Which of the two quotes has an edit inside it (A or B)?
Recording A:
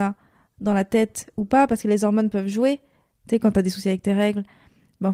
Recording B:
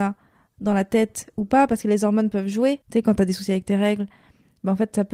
B